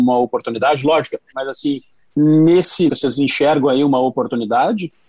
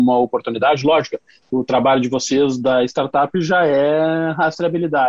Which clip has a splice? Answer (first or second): first